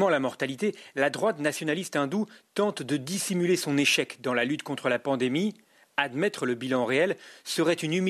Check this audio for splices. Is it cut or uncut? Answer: uncut